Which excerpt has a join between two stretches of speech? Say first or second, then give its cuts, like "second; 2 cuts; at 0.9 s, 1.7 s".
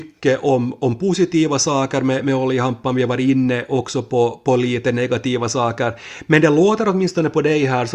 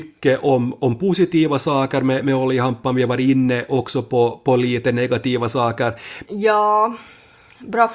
second; 1 cut; at 6.2 s